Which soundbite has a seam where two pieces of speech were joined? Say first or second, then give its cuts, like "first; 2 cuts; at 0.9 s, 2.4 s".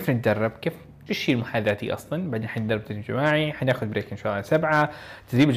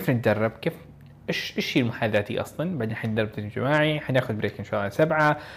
first; 1 cut; at 1.1 s